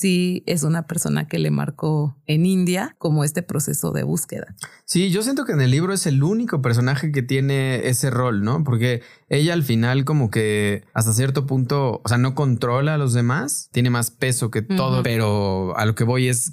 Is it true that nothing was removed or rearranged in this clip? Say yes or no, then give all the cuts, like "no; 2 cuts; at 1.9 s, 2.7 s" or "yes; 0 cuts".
no; 2 cuts; at 13.7 s, 15.0 s